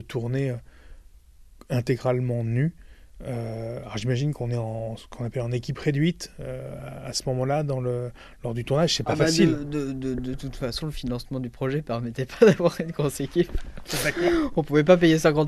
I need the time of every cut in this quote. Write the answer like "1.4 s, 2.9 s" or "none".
none